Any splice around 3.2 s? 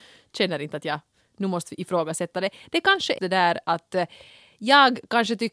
yes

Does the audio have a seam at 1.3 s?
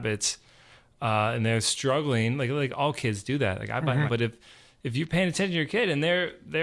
no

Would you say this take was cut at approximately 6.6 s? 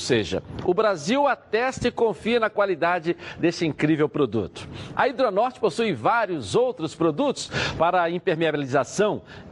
no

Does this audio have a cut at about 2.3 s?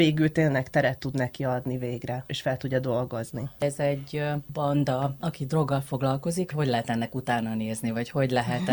yes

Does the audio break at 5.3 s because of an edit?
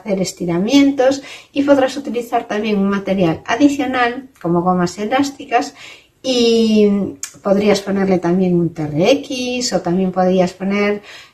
no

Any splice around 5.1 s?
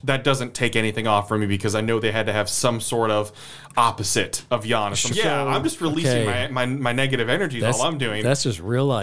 yes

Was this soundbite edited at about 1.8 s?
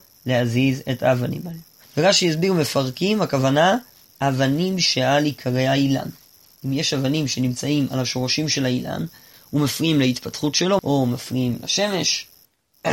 yes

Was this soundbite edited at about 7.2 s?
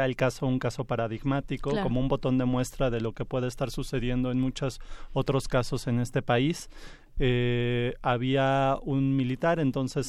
yes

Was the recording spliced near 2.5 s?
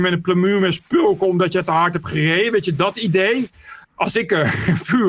no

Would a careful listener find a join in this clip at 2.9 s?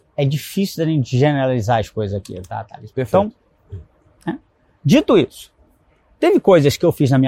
yes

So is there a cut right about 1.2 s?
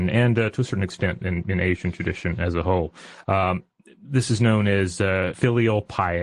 no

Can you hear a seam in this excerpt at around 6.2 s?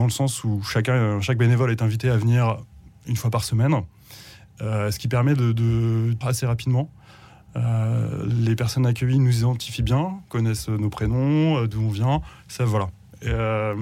yes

